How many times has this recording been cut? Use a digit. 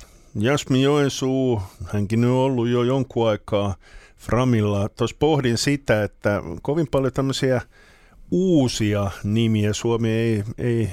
0